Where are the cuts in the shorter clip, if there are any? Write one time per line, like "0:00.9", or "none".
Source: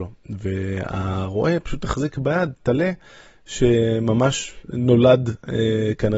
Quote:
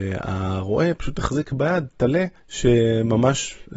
0:02.4